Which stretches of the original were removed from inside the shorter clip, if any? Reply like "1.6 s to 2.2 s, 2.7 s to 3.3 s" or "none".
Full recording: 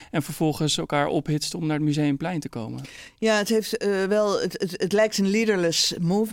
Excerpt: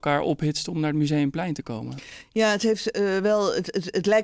none